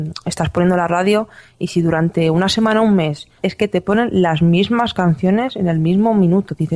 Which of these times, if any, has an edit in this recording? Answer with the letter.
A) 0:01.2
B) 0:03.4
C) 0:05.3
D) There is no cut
B